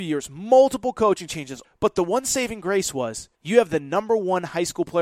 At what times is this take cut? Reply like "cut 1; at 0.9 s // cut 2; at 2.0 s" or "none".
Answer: cut 1; at 1.6 s // cut 2; at 3.4 s